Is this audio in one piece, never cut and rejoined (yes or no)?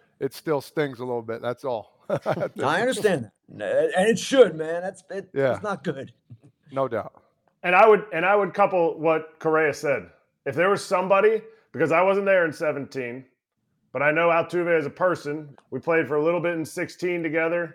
no